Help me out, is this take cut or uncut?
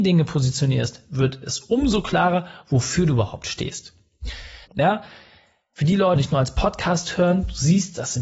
cut